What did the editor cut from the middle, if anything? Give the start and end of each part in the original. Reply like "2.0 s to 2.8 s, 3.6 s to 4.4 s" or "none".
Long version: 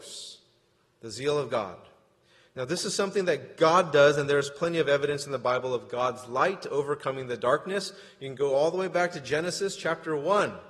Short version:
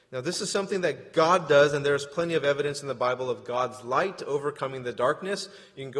none